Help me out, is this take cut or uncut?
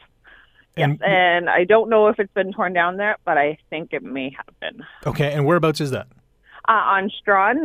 uncut